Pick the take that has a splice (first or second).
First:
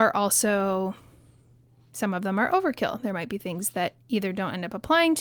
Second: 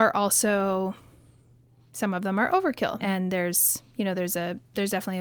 second